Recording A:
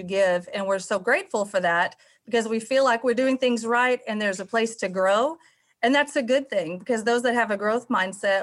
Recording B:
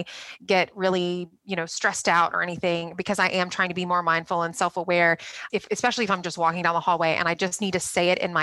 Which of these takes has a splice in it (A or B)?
B